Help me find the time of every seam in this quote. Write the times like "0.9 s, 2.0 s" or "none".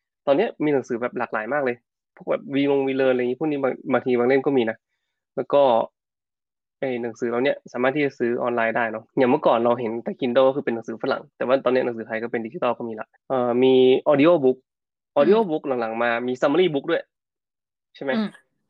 9.1 s, 13.2 s